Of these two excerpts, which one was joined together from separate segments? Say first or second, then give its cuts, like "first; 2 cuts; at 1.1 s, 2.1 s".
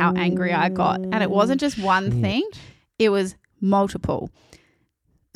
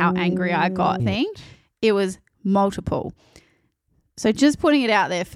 second; 1 cut; at 1.0 s